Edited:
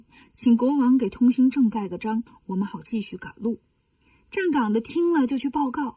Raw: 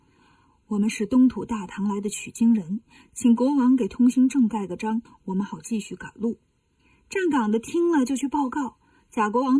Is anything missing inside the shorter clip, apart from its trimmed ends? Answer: no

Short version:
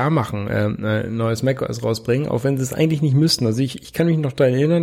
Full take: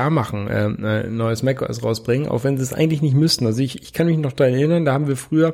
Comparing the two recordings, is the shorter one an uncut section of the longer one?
yes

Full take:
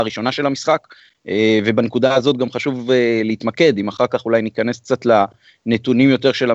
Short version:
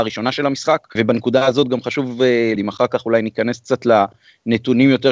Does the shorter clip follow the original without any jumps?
no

